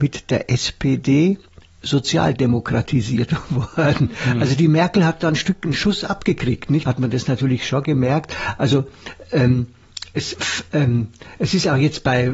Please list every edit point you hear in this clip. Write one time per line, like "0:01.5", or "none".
0:06.9
0:10.3